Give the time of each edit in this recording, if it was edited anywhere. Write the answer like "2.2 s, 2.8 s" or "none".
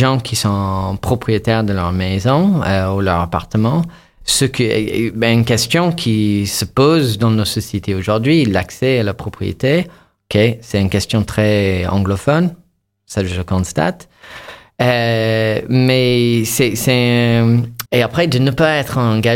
17.9 s